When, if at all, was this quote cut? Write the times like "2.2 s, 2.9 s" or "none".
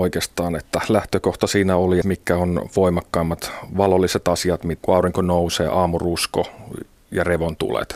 2.0 s, 4.8 s